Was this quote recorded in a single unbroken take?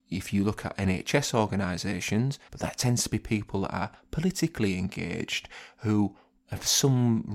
no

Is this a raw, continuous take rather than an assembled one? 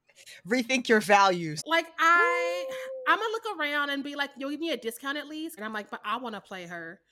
no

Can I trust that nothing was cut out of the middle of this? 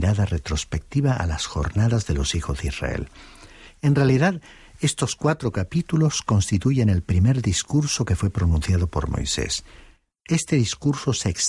yes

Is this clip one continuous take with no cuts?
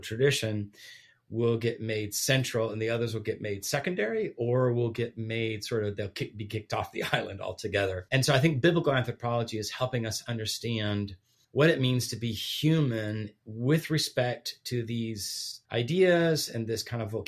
no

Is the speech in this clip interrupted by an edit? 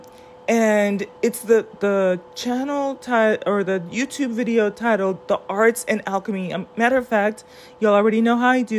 yes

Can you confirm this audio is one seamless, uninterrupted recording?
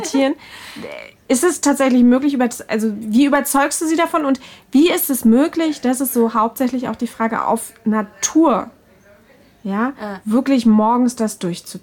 yes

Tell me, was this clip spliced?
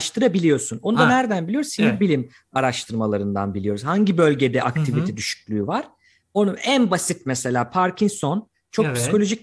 no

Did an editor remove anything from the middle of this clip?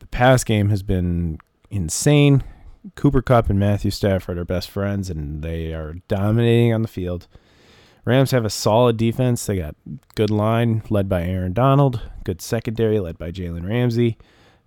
no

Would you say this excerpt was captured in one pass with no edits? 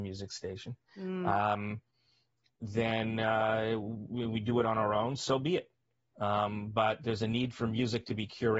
yes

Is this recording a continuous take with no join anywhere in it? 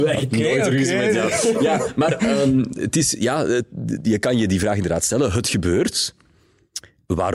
yes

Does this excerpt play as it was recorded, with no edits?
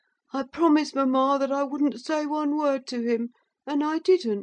yes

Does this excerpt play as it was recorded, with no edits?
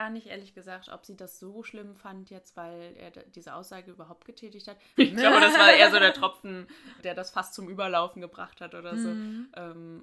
no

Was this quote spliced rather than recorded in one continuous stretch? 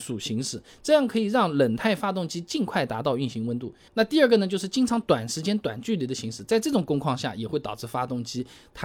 yes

